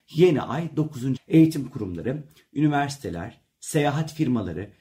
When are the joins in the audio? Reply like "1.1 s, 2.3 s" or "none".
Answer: 1.2 s